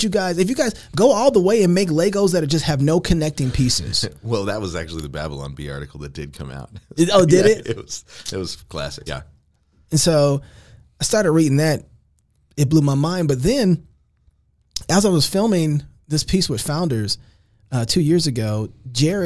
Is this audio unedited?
no; 1 cut; at 9.1 s

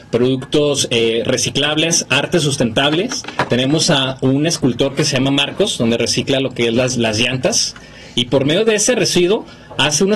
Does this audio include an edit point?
no; 0 cuts

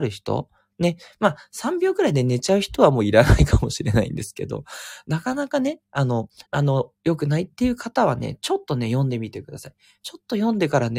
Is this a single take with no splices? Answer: no; 1 cut; at 6.4 s

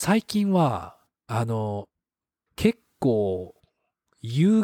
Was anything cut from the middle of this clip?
yes; 1 cut; at 2.5 s

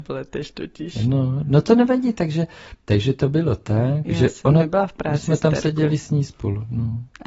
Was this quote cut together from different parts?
no; 0 cuts

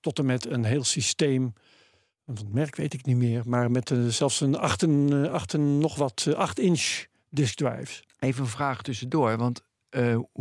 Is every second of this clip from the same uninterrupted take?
yes; 0 cuts

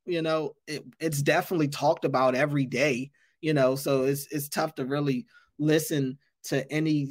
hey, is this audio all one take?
yes; 0 cuts

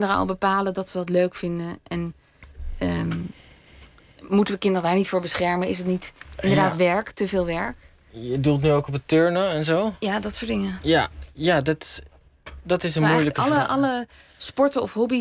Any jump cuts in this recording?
no; 0 cuts

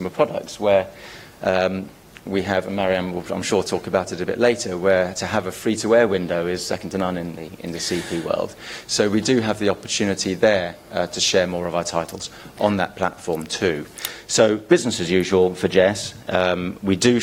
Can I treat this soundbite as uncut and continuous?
yes; 0 cuts

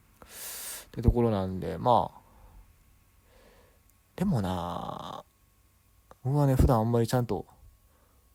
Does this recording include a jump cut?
yes; 1 cut; at 6.2 s

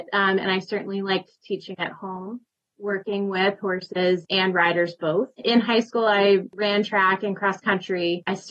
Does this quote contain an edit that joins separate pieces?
yes; 1 cut; at 5.4 s

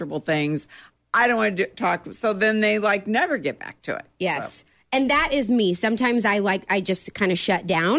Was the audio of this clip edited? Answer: no; 0 cuts

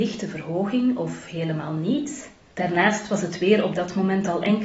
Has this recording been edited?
yes; 1 cut; at 2.5 s

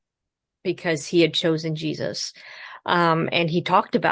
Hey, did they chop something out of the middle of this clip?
no; 0 cuts

